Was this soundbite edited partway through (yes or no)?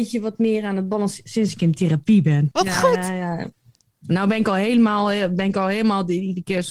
yes